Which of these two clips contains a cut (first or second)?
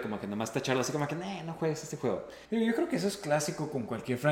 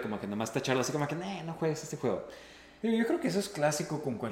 first